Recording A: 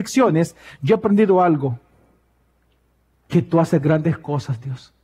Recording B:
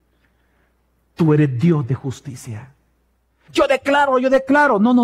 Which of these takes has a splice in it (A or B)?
B